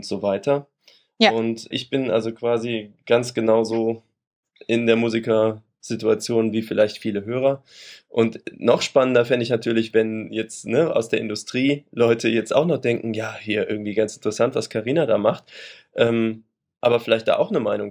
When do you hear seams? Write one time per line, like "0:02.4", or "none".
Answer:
0:01.7